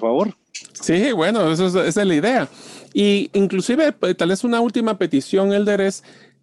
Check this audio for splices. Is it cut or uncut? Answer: uncut